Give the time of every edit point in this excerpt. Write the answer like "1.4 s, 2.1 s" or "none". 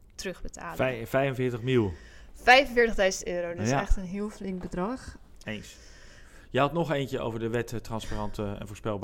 5.4 s